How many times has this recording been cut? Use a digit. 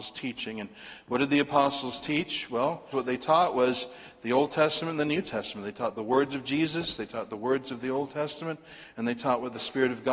1